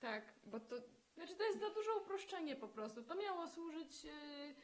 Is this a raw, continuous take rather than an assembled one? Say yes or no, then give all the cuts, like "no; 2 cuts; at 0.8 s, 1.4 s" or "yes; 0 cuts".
yes; 0 cuts